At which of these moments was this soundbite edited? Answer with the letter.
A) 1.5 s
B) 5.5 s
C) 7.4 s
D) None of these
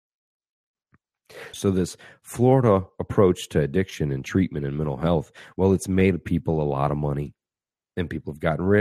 A